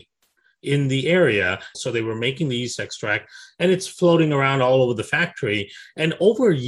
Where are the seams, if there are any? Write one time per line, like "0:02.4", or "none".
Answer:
0:01.7